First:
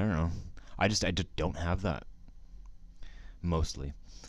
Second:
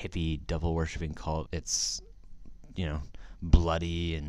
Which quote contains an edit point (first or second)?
second